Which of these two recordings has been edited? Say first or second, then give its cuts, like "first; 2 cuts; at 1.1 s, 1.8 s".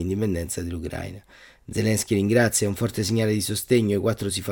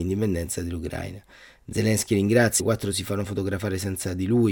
second; 1 cut; at 2.6 s